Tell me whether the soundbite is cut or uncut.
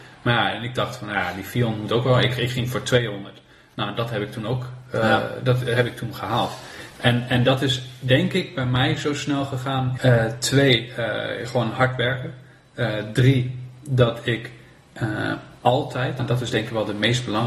cut